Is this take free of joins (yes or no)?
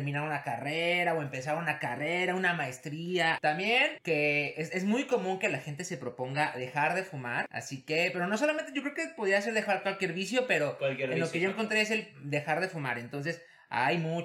yes